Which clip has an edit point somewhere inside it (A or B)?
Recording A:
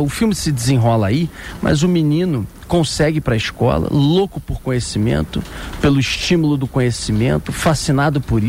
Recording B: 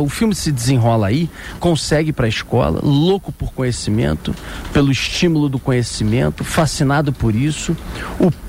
B